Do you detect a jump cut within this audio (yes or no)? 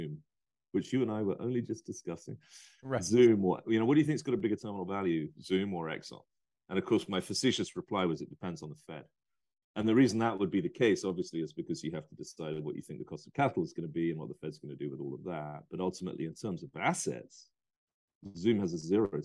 no